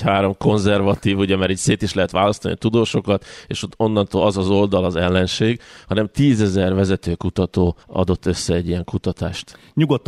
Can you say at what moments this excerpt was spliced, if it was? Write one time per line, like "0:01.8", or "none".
0:07.8